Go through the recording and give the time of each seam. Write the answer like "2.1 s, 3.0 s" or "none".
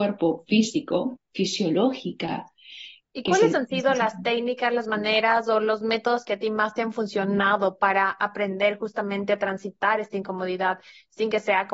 1.2 s, 3.0 s